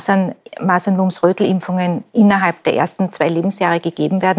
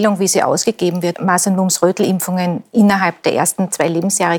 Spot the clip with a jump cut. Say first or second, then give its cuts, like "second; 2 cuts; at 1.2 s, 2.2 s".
second; 1 cut; at 1.1 s